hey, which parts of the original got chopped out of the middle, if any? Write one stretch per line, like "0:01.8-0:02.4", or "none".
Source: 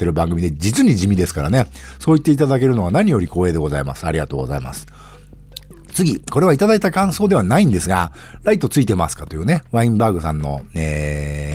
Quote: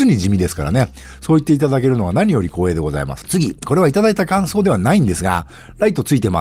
0:04.0-0:05.9